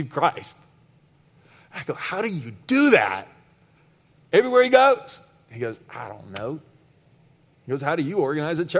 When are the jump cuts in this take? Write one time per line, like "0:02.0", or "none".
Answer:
none

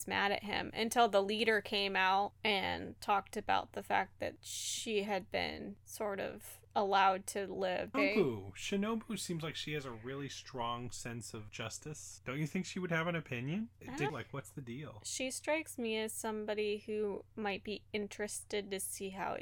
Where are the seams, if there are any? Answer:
0:07.9
0:14.1

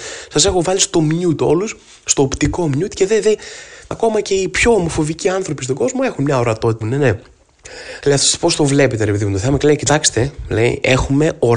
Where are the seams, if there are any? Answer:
0:03.9
0:06.8
0:08.0

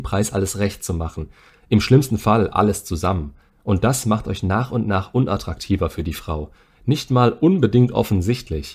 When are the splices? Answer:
0:01.5

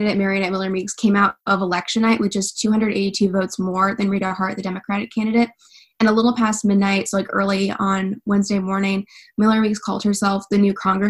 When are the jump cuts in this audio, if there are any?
none

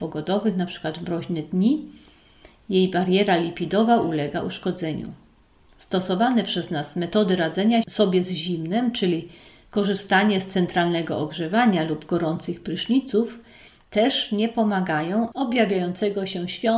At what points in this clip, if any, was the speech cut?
0:15.3

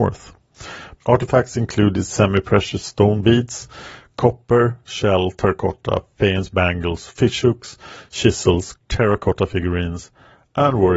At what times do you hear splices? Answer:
0:01.0
0:08.7

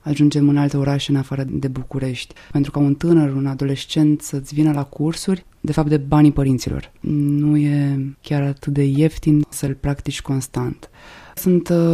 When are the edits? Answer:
0:05.5

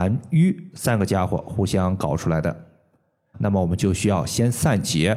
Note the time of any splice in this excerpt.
0:03.3

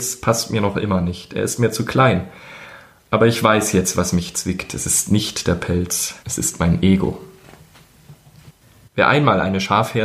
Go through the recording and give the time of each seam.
0:06.2
0:08.9

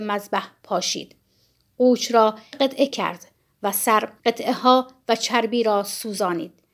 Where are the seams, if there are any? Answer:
0:02.5
0:04.2

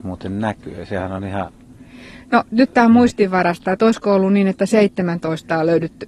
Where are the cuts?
none

